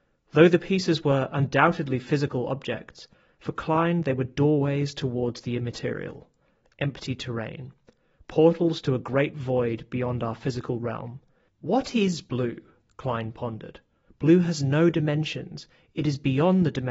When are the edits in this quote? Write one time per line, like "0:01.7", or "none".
0:11.5
0:14.1